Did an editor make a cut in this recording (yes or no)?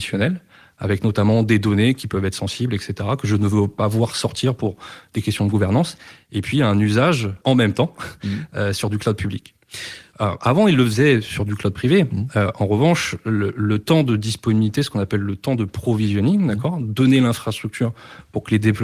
yes